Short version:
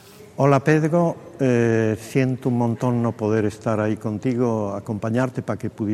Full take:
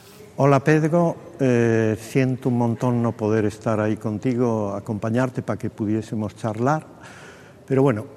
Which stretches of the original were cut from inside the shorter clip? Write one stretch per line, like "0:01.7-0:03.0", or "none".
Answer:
none